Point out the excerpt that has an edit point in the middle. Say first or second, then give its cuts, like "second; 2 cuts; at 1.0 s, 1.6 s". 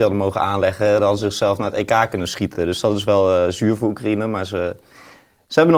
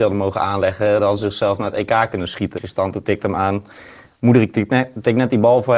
second; 1 cut; at 2.5 s